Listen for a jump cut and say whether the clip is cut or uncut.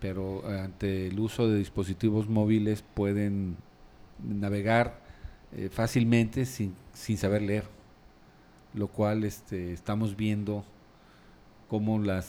uncut